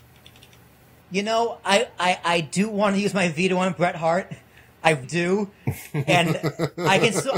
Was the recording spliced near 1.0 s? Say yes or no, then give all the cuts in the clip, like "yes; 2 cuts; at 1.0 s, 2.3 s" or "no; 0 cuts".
no; 1 cut; at 5.0 s